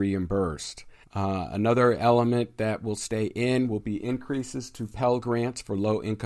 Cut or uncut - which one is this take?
cut